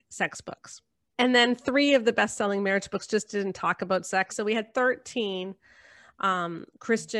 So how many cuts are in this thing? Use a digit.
1